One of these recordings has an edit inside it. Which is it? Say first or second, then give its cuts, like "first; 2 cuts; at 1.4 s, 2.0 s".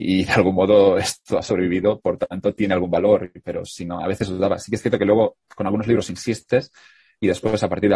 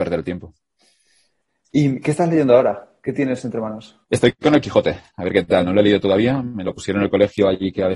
second; 1 cut; at 4.0 s